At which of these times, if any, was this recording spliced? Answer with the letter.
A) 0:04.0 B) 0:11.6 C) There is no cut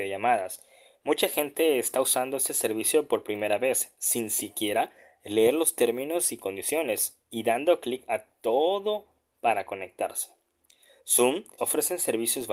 B